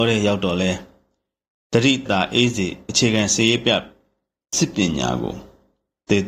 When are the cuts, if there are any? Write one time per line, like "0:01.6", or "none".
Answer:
0:02.1